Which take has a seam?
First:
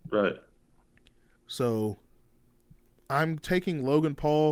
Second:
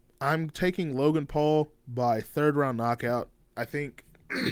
first; 1 cut; at 1.3 s

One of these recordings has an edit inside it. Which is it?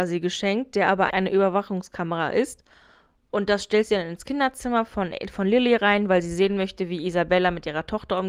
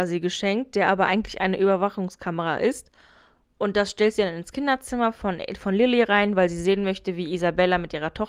first; 1 cut; at 1.1 s

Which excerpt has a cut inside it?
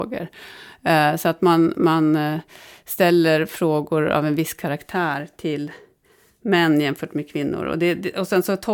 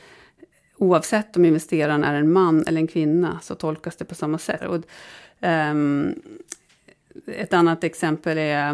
second; 1 cut; at 4.6 s

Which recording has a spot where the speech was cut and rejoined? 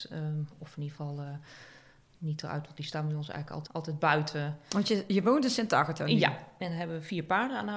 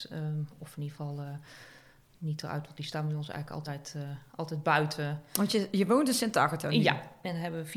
first; 1 cut; at 3.7 s

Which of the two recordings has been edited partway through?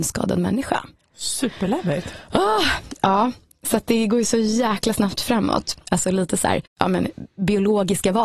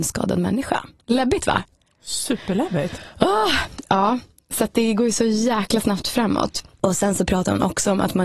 first; 2 cuts; at 1.0 s, 5.8 s

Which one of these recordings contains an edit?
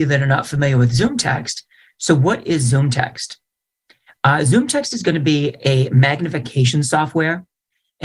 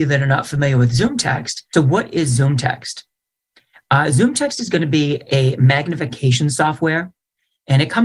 second; 1 cut; at 1.7 s

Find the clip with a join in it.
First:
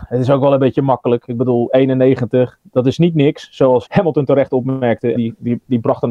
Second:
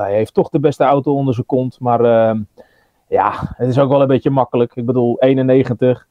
first; 2 cuts; at 3.9 s, 5.1 s

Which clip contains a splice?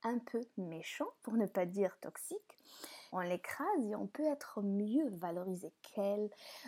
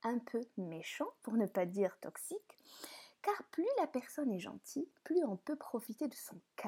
first; 1 cut; at 3.1 s

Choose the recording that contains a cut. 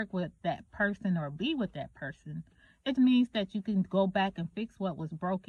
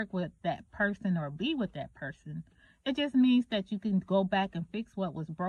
first; 1 cut; at 3.0 s

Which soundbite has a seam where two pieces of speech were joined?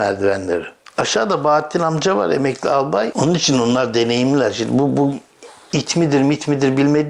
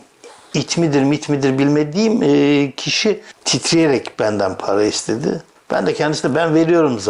first; 1 cut; at 3.1 s

